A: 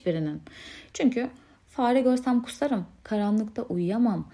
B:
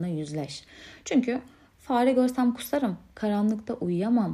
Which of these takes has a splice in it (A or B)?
A